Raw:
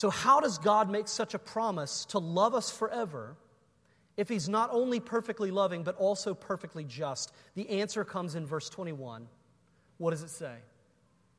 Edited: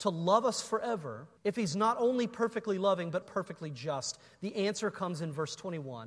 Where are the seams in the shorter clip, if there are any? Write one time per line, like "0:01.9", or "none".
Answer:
0:01.4
0:03.2